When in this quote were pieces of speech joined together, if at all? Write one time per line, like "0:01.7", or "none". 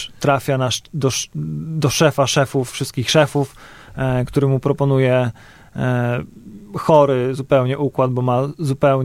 none